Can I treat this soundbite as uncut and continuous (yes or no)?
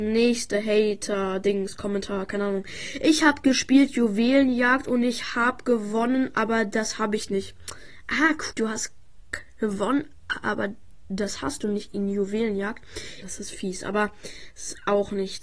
no